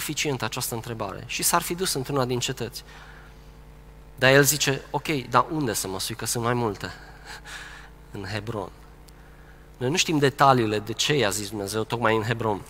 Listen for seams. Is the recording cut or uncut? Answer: uncut